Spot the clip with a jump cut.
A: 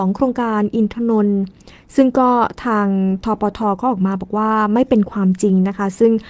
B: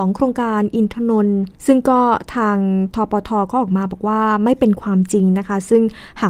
B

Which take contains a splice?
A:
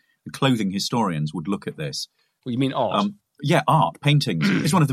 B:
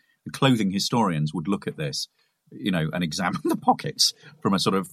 A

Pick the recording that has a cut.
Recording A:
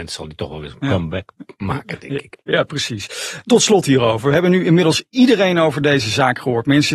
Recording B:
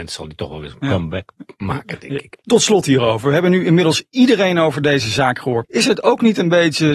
B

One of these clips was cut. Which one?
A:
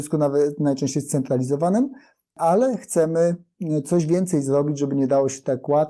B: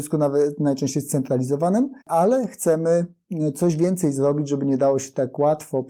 B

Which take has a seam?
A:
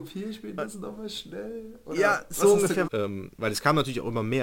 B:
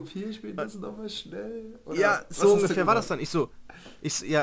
A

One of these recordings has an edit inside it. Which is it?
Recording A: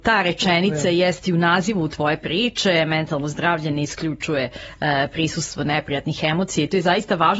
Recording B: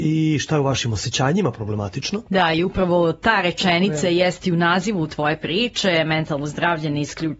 B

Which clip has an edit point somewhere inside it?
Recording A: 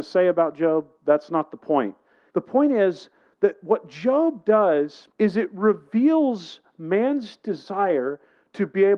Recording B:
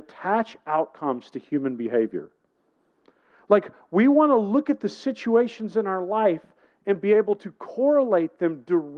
A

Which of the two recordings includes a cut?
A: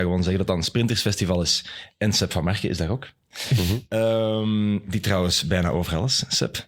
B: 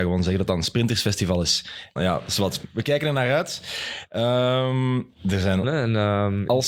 B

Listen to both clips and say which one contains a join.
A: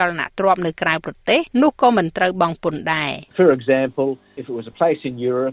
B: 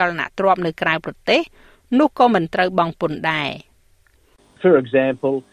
A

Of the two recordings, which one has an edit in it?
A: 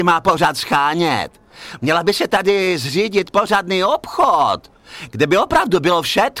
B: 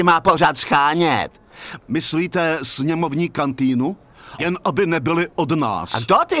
B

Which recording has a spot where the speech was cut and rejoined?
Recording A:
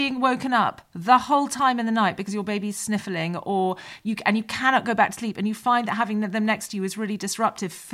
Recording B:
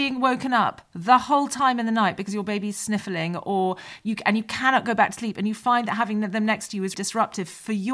B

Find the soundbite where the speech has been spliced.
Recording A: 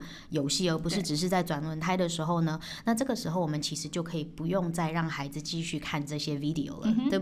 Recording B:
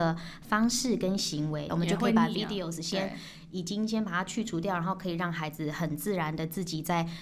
B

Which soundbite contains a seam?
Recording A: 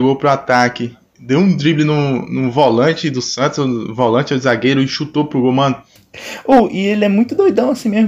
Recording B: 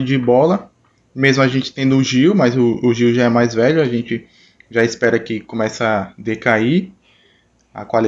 A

